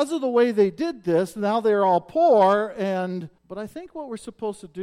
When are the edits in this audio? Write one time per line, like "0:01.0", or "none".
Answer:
0:03.4

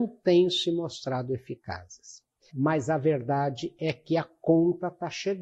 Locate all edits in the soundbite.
0:02.5

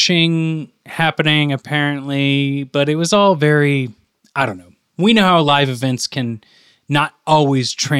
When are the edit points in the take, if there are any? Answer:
none

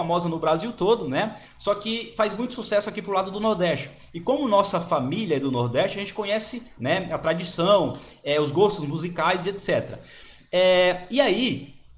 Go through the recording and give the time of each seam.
0:06.8

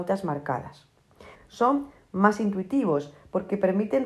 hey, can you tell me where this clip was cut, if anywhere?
0:01.3

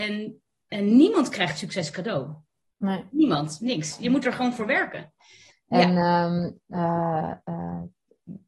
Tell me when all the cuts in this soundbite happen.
0:05.5

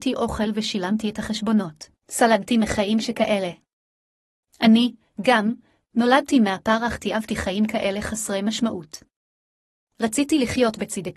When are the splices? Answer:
0:02.0

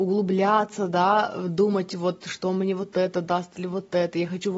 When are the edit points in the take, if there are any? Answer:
none

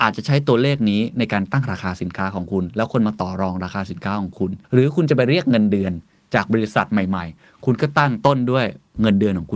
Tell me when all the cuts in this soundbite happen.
0:04.6

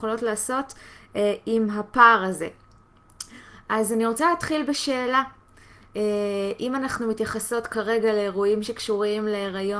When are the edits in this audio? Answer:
none

